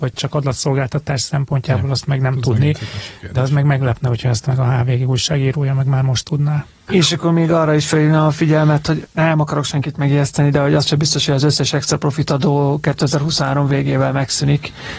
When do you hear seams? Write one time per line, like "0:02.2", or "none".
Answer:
0:06.9